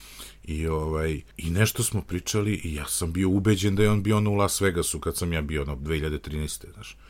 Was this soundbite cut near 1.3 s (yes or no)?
yes